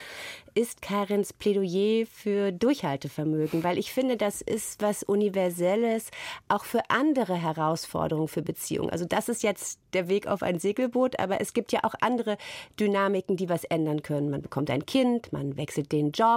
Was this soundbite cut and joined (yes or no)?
no